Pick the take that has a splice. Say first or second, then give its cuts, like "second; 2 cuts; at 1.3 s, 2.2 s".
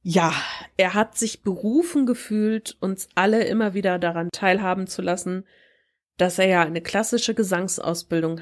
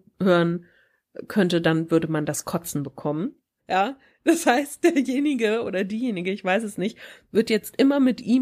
second; 1 cut; at 3.6 s